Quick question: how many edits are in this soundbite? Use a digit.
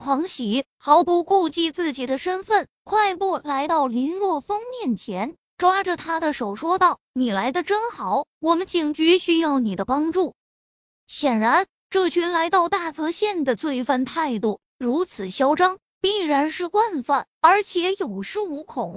1